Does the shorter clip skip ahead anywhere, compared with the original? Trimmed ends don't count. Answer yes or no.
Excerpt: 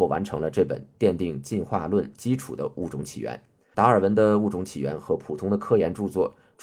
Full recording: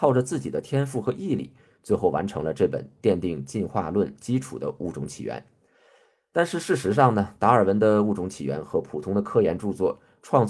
yes